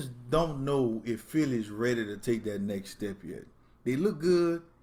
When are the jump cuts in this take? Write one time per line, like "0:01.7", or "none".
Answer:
none